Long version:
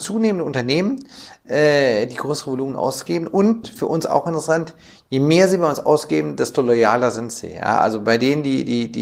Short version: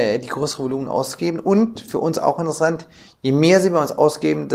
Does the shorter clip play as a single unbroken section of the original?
yes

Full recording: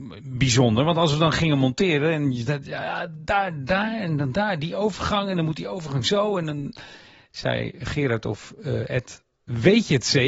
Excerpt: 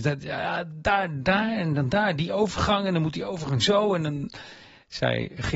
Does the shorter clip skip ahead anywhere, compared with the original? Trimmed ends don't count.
no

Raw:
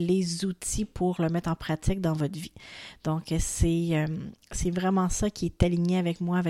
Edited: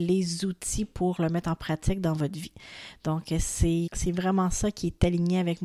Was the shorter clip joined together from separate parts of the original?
yes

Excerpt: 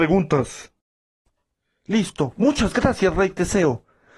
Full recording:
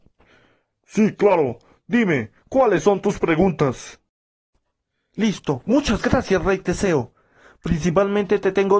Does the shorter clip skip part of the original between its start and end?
no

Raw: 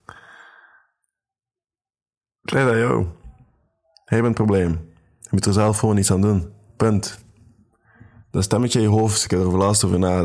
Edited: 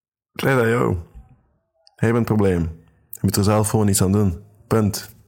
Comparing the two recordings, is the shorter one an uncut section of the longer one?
yes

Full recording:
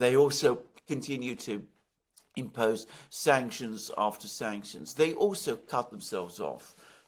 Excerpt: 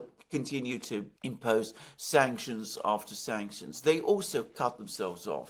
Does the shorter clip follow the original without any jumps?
no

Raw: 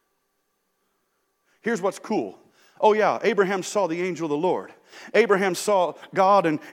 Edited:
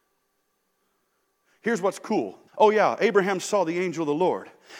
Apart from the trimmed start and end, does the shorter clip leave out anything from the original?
yes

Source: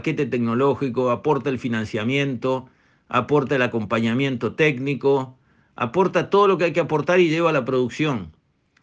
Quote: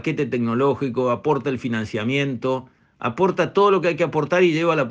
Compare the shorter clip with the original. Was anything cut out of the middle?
yes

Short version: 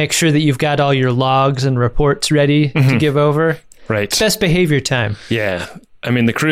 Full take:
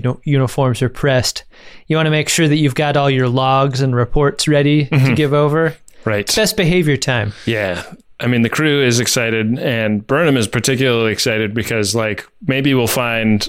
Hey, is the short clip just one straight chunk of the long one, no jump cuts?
yes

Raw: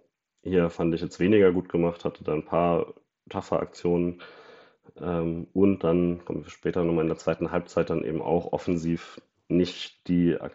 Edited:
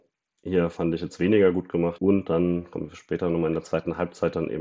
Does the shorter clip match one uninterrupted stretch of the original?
no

